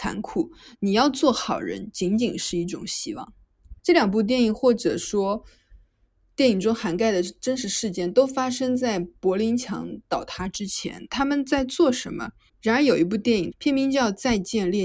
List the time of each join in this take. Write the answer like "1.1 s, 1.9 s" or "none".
3.8 s, 12.5 s, 13.5 s